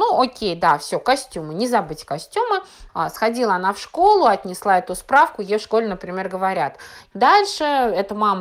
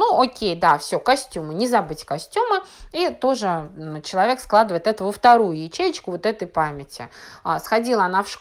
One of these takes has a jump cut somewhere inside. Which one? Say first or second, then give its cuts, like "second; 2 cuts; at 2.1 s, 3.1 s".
first; 2 cuts; at 2.9 s, 7.1 s